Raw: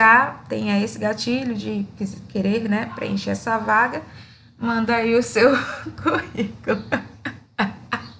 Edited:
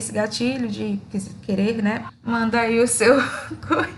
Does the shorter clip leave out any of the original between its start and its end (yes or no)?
yes